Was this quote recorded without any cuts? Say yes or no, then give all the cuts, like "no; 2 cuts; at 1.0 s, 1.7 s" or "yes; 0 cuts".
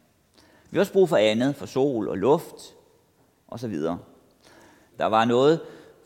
no; 1 cut; at 4.9 s